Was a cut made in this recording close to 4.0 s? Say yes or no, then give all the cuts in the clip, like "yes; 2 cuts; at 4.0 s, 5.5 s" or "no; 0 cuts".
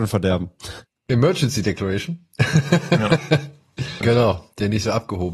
yes; 1 cut; at 4.0 s